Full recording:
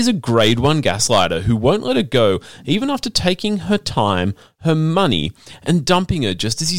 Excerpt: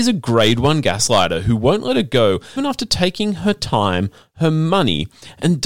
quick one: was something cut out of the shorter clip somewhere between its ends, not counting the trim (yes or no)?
yes